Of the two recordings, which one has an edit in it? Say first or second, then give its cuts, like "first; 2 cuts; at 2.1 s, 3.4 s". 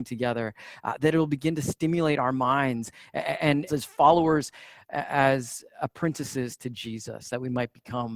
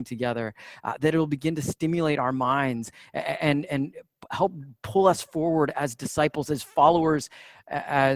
first; 1 cut; at 3.7 s